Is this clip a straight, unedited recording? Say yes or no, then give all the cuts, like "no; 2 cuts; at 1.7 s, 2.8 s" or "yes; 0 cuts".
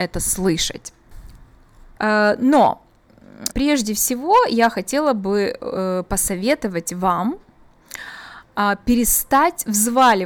no; 2 cuts; at 2.0 s, 3.5 s